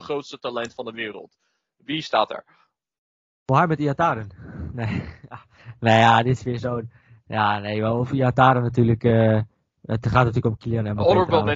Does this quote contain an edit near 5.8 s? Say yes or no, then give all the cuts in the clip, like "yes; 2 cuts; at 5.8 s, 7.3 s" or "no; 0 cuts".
no; 0 cuts